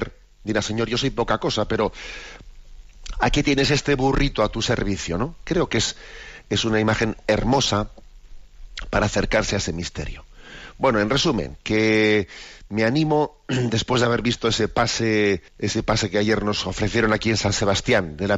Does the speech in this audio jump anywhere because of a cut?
yes; 1 cut; at 15.5 s

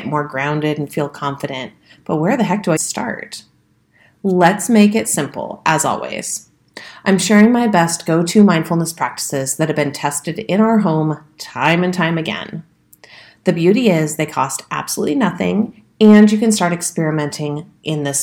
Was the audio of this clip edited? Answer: yes; 1 cut; at 2.8 s

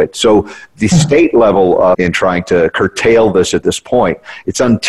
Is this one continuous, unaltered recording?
no; 1 cut; at 1.9 s

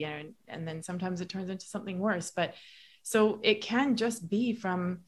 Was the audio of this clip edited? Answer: no; 0 cuts

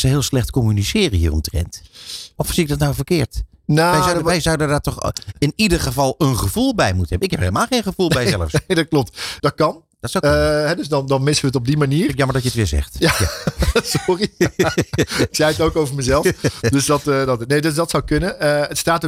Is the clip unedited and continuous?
no; 1 cut; at 9.4 s

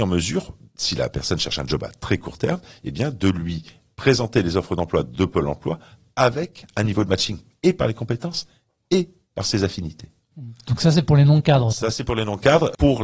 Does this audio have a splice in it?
no; 0 cuts

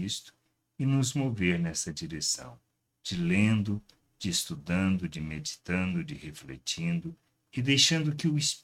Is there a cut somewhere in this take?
no; 0 cuts

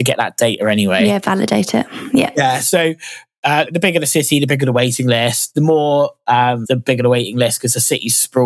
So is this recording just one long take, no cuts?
no; 2 cuts; at 3.7 s, 6.6 s

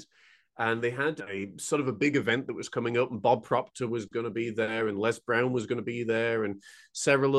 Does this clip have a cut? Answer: no; 0 cuts

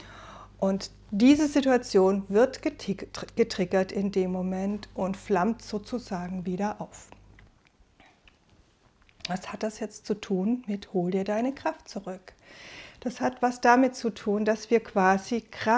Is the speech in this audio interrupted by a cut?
no; 0 cuts

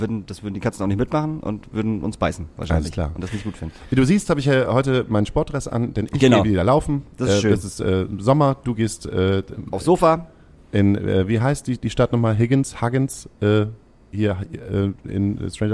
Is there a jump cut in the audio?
no; 0 cuts

